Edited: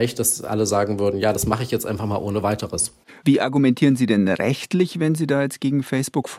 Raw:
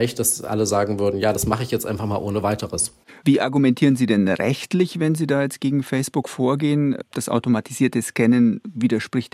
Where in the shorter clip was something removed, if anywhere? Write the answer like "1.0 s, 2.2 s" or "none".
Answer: none